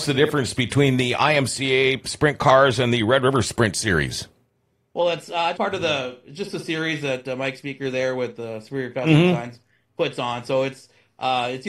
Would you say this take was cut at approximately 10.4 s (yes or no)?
no